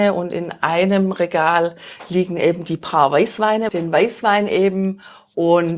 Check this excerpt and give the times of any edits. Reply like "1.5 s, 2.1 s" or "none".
3.7 s